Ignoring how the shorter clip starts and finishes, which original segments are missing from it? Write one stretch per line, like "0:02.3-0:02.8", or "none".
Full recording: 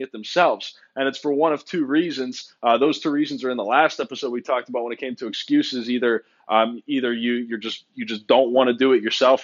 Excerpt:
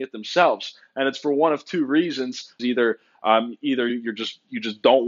0:02.6-0:05.8
0:07.1-0:07.3